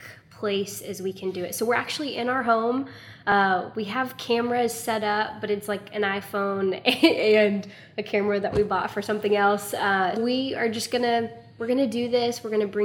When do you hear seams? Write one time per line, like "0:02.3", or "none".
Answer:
0:10.2